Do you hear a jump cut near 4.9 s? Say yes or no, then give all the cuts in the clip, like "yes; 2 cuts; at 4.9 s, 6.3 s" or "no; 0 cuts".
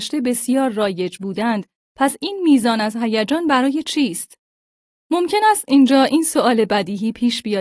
yes; 1 cut; at 4.9 s